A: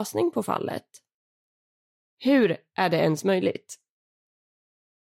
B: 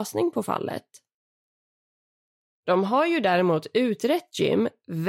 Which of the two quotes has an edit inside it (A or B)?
A